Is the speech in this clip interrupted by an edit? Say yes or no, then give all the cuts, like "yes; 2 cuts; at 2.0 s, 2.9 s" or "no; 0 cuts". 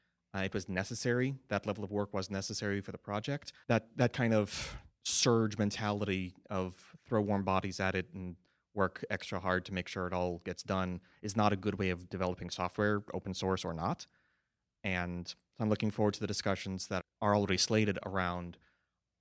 yes; 2 cuts; at 3.6 s, 17.0 s